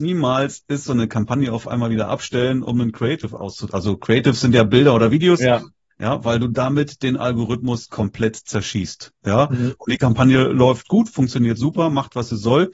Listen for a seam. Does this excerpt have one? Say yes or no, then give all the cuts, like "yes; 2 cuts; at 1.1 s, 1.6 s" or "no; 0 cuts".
yes; 1 cut; at 5.9 s